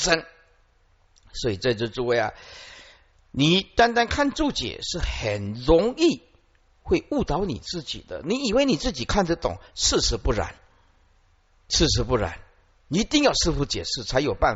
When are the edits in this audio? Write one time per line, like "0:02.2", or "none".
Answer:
none